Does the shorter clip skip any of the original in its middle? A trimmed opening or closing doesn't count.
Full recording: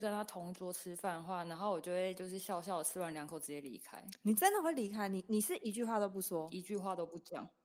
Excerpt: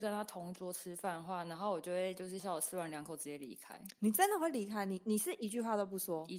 yes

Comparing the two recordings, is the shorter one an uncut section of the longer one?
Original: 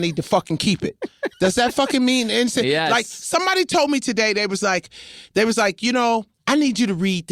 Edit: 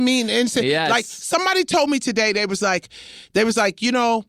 yes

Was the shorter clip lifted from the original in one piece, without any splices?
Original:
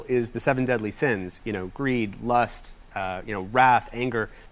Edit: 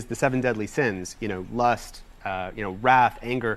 no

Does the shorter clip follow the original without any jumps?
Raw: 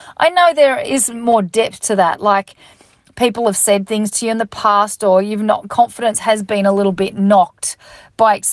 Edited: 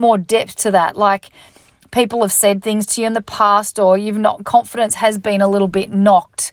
yes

